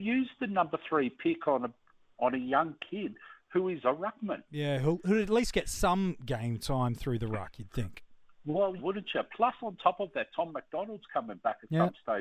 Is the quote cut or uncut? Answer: cut